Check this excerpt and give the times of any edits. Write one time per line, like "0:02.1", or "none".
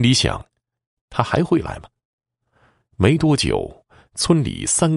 none